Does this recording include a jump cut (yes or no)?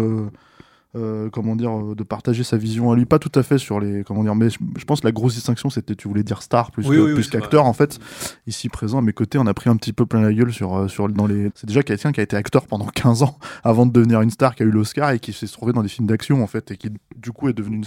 yes